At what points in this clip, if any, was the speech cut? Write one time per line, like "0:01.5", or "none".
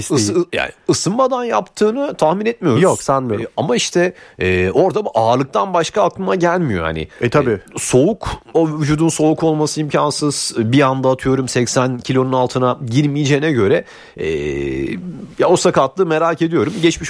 0:08.5